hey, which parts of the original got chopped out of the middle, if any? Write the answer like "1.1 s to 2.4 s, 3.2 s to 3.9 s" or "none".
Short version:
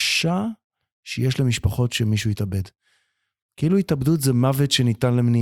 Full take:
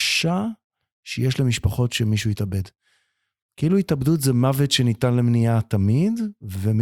none